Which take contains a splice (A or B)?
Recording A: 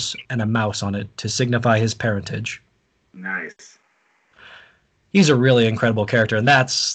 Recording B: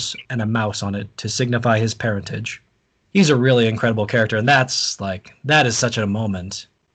B